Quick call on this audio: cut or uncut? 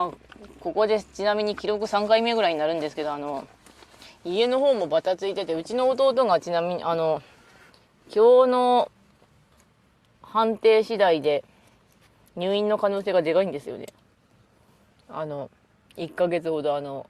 uncut